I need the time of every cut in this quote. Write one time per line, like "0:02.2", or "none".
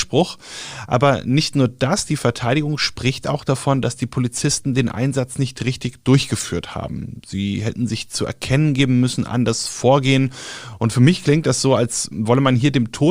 none